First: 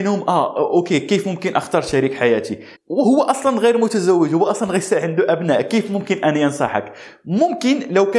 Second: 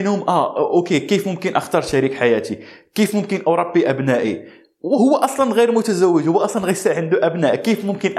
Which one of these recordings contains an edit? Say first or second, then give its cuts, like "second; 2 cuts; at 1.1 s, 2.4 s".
first; 1 cut; at 2.7 s